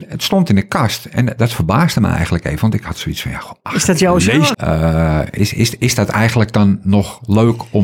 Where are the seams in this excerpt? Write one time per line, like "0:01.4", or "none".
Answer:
0:04.5